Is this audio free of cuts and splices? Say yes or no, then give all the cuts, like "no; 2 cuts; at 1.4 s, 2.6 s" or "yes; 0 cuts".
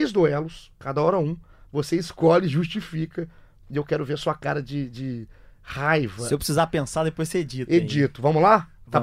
yes; 0 cuts